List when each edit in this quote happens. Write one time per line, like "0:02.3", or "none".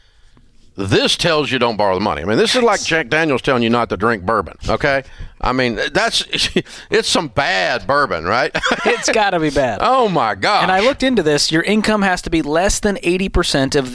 0:04.6